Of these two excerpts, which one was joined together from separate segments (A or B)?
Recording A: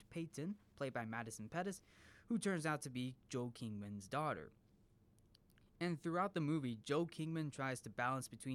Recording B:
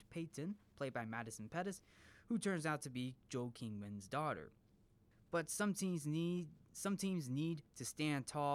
B